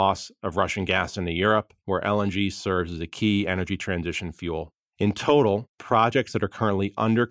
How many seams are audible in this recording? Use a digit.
1